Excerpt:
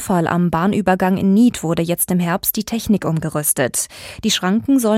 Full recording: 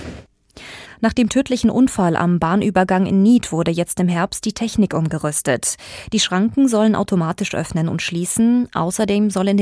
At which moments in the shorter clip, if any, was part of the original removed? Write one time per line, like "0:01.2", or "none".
none